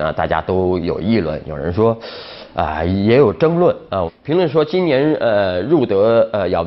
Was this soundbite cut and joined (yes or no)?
yes